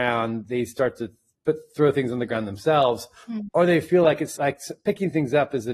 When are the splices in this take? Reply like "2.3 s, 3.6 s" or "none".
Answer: 4.4 s